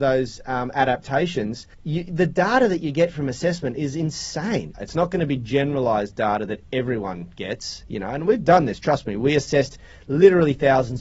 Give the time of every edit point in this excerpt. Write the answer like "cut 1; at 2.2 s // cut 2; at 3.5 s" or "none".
cut 1; at 1.7 s // cut 2; at 4.7 s